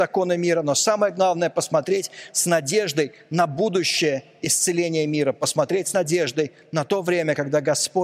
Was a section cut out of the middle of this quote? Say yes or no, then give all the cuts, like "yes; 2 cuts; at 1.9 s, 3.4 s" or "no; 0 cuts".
no; 0 cuts